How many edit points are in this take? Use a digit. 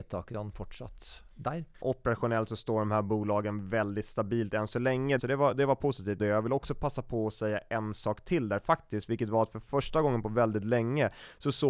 3